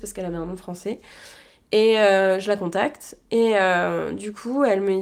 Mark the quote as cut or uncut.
uncut